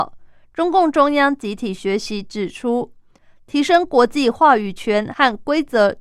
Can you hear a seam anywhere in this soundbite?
no; 0 cuts

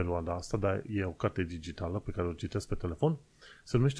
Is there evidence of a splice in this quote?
no; 0 cuts

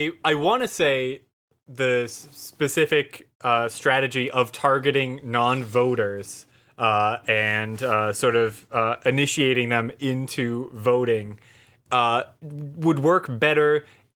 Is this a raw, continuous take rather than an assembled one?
yes; 0 cuts

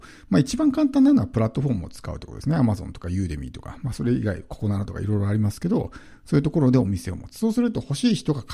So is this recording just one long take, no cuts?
yes; 0 cuts

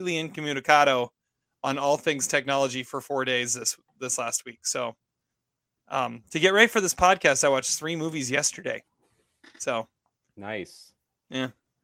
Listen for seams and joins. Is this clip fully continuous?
yes; 0 cuts

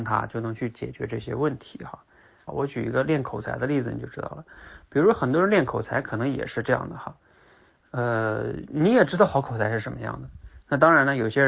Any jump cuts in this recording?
yes; 1 cut; at 2.5 s

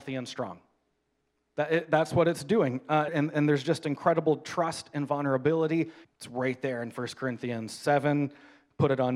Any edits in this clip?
yes; 2 cuts; at 3.1 s, 6.0 s

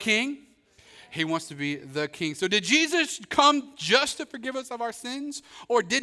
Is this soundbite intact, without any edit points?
yes; 0 cuts

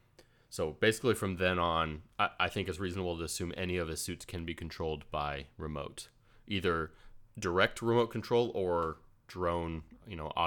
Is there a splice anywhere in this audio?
no; 0 cuts

